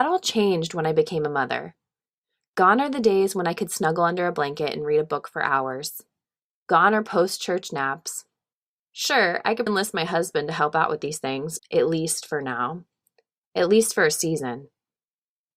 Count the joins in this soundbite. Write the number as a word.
two